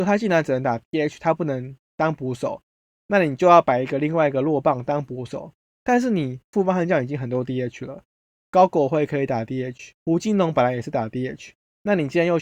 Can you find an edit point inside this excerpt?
yes; 2 cuts; at 8.3 s, 9.9 s

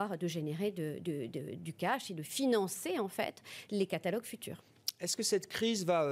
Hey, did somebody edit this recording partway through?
no; 0 cuts

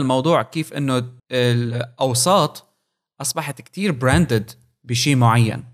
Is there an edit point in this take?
yes; 1 cut; at 1.2 s

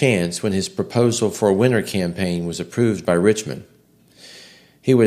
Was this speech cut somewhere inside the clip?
no; 0 cuts

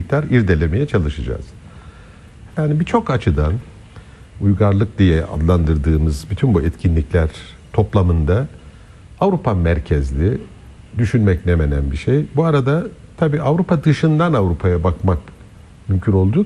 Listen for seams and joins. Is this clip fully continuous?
no; 1 cut; at 2.5 s

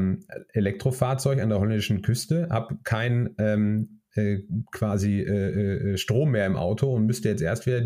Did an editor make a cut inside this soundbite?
no; 0 cuts

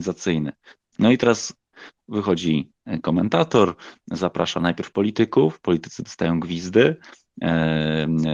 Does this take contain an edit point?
yes; 1 cut; at 0.9 s

